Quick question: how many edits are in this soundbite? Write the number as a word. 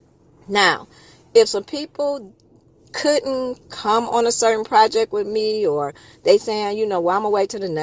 zero